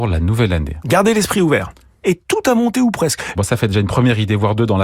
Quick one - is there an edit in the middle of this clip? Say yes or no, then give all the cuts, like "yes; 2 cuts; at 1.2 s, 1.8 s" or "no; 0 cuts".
yes; 2 cuts; at 2.0 s, 3.4 s